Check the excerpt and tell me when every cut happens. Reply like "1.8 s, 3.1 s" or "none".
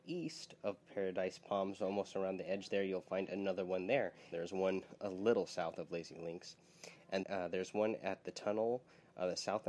4.3 s, 7.2 s